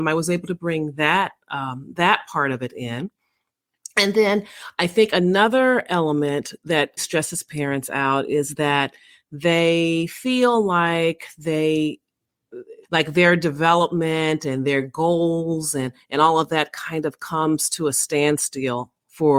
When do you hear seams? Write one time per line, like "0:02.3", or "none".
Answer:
0:07.0
0:12.8